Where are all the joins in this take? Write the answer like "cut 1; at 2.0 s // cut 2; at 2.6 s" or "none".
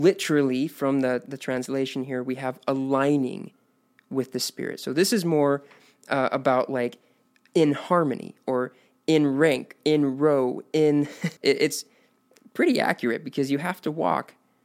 cut 1; at 11.4 s